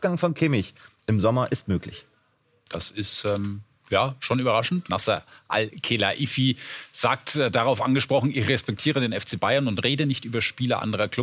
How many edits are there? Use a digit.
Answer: 1